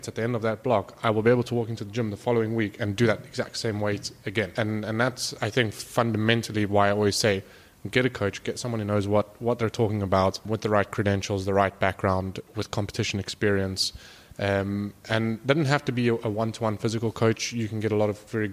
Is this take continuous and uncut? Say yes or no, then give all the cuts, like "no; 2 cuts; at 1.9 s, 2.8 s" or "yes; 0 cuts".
yes; 0 cuts